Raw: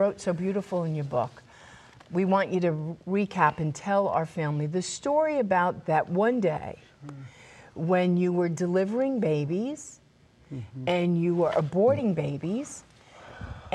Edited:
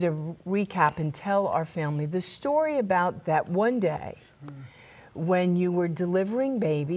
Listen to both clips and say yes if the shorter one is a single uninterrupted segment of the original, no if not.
yes